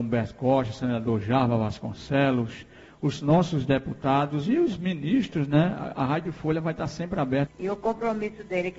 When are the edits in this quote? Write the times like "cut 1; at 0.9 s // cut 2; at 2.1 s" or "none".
cut 1; at 7.5 s